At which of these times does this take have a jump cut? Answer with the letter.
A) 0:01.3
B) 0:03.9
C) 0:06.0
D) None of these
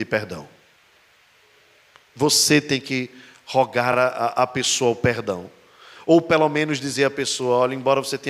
D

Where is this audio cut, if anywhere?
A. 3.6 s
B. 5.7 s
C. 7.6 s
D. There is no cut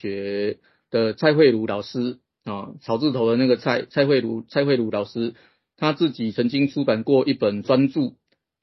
D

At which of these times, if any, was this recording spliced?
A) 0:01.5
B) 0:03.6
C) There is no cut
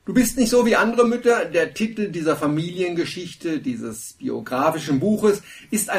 C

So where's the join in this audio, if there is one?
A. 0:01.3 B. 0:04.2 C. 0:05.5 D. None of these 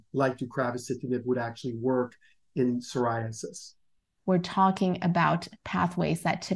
B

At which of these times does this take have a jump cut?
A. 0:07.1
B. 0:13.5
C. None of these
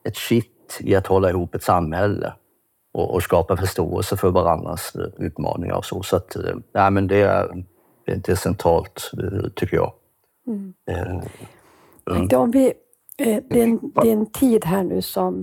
B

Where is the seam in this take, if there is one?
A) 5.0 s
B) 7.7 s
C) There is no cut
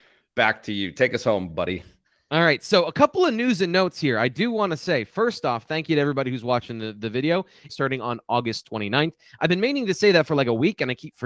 B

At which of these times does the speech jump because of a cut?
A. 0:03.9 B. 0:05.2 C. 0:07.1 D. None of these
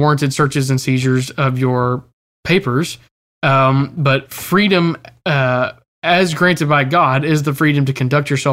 D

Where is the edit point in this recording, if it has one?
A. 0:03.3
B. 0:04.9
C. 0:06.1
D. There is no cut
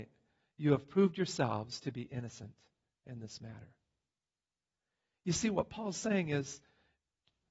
D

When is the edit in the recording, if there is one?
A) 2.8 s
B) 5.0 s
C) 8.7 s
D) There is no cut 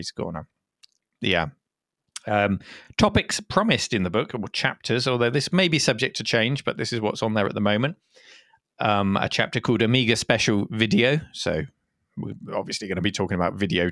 D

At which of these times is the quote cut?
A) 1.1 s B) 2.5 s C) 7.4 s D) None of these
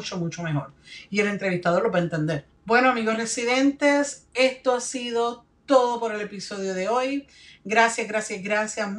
B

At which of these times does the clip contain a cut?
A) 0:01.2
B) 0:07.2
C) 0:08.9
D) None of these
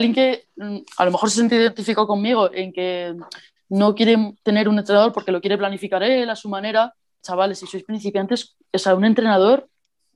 B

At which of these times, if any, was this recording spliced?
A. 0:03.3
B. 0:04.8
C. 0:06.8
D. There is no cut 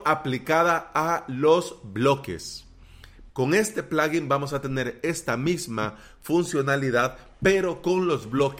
A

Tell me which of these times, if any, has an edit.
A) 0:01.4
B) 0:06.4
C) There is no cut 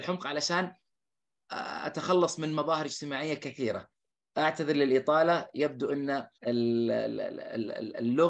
B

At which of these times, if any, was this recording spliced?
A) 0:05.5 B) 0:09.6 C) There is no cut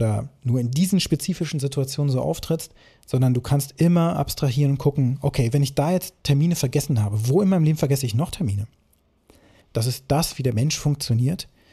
B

